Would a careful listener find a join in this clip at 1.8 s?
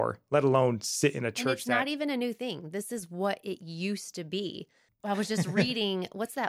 no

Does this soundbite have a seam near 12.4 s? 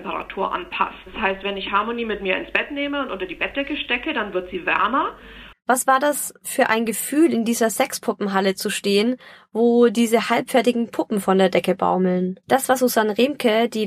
yes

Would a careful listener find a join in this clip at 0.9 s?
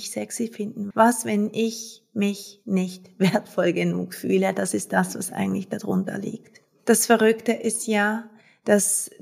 yes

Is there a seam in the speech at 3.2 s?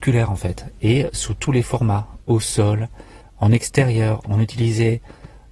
yes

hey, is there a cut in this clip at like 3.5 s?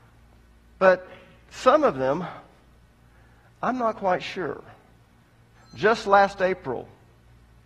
no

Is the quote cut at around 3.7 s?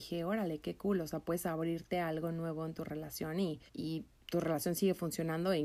yes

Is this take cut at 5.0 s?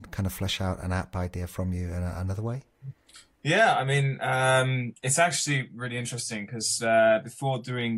no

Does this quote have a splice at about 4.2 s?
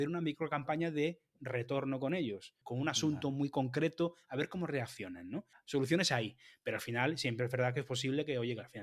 no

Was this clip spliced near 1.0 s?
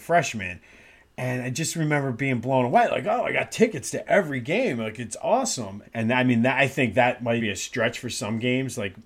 no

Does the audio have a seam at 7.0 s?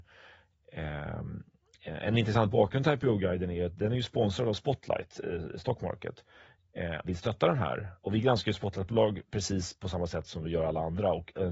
yes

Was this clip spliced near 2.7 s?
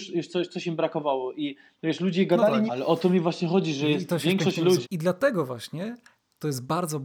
yes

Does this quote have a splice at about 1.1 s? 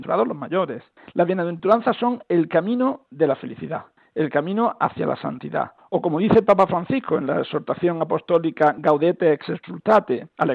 no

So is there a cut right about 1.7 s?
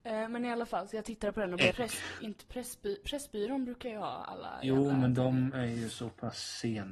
yes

